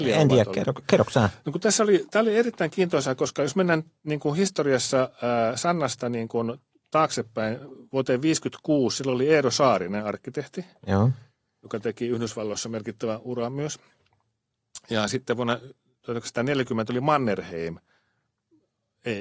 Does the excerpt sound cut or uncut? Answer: uncut